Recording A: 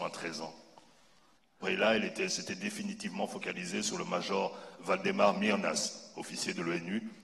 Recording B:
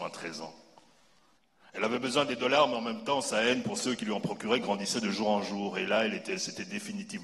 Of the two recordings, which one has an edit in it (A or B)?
A